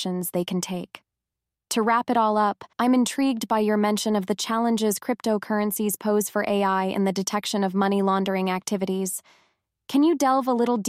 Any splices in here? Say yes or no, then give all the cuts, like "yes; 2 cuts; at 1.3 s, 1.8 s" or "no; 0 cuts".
yes; 2 cuts; at 1.5 s, 2.7 s